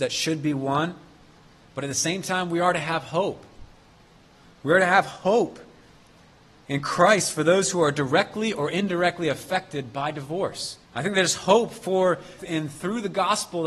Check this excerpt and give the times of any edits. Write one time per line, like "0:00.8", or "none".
0:10.8
0:12.4